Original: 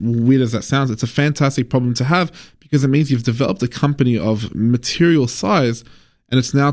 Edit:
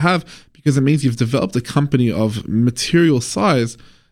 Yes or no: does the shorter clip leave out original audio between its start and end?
no